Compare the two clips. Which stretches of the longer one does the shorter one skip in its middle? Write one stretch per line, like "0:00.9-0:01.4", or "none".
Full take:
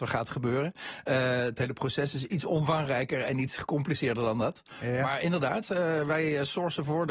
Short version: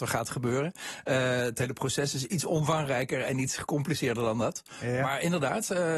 none